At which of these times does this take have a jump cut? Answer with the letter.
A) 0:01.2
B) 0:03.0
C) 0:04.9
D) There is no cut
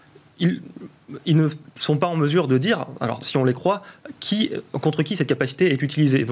D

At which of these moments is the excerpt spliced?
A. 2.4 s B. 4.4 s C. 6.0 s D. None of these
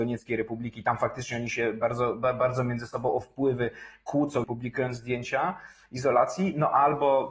B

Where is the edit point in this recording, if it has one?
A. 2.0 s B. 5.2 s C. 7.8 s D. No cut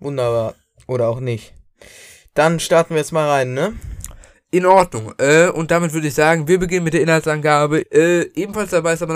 C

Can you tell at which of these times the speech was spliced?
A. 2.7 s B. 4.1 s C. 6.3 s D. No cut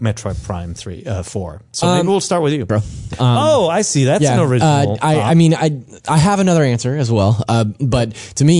A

